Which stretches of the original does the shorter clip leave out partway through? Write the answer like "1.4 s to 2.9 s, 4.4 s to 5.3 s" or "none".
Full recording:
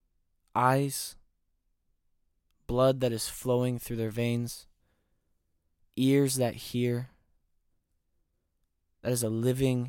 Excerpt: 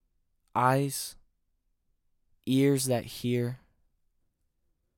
2.3 s to 5.8 s